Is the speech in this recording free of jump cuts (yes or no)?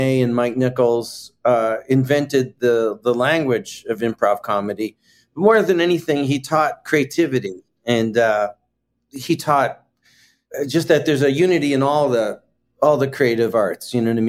yes